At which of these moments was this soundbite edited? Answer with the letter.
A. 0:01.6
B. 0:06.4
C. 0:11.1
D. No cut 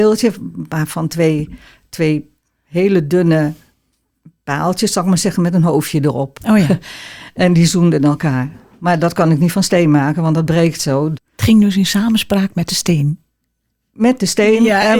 C